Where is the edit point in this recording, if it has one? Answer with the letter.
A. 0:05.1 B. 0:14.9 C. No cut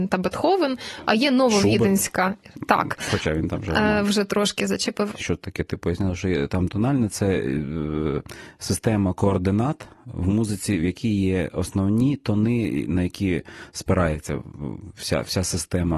A